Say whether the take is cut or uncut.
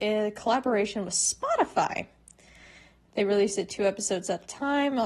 uncut